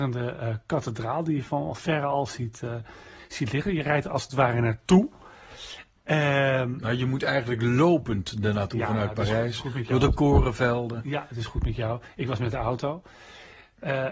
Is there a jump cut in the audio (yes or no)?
no